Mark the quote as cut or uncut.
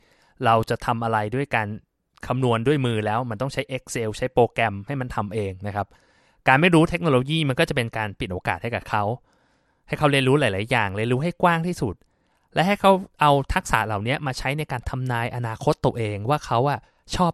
uncut